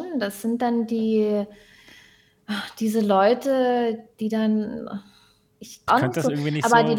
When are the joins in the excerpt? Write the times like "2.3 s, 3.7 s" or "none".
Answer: 5.9 s